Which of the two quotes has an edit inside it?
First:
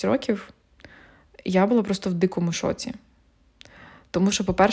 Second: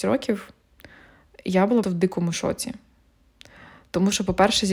second; 1 cut; at 1.8 s

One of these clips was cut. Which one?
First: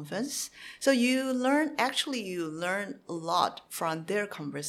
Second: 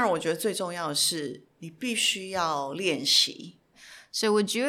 second; 1 cut; at 3.7 s

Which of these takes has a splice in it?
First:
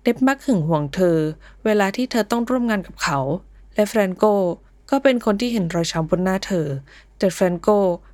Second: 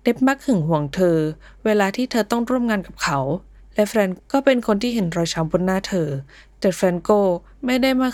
second; 1 cut; at 4.2 s

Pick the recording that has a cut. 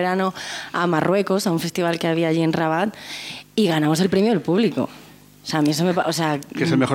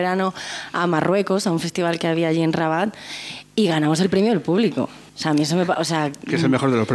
second; 1 cut; at 5.1 s

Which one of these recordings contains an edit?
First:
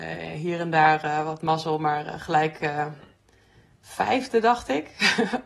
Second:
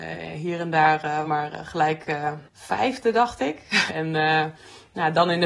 second; 3 cuts; at 1.2 s, 2.5 s, 3.9 s

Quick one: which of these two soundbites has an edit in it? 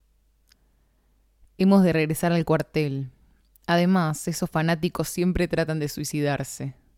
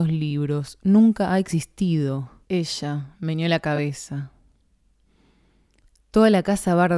second; 1 cut; at 2.4 s

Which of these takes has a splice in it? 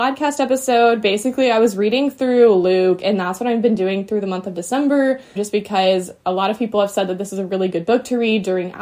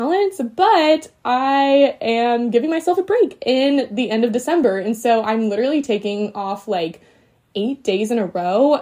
first; 1 cut; at 5.4 s

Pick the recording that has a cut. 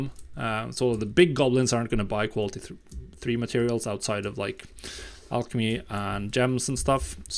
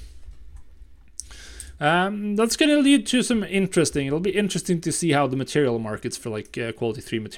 second; 1 cut; at 1.8 s

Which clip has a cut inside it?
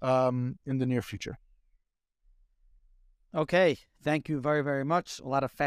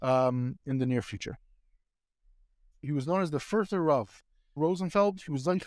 second; 2 cuts; at 2.7 s, 4.6 s

